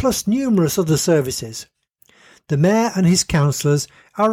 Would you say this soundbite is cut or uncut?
uncut